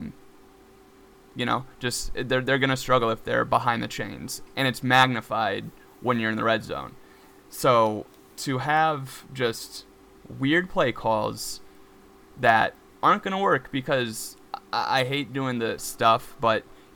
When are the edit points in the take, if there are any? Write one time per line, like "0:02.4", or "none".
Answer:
0:04.5
0:15.8

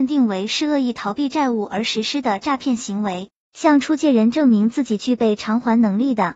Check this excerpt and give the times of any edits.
0:03.4

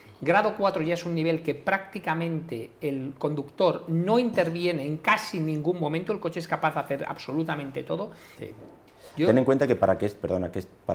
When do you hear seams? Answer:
0:08.4

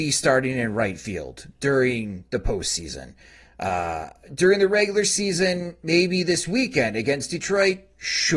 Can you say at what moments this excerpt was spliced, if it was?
none

